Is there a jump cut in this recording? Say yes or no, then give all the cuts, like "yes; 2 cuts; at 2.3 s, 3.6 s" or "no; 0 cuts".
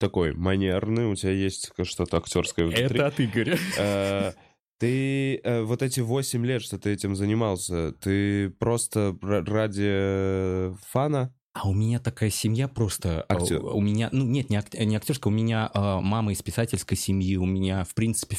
no; 0 cuts